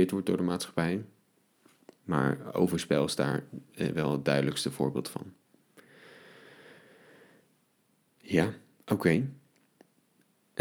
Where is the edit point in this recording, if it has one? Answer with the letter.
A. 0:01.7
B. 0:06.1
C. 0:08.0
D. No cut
D